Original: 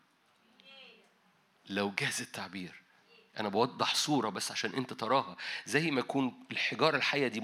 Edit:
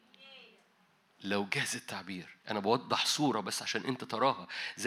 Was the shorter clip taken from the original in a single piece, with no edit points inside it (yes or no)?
no